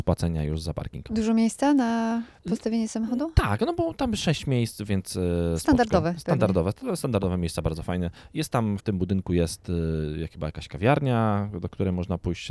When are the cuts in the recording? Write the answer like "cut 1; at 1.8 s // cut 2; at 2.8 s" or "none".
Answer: cut 1; at 8.8 s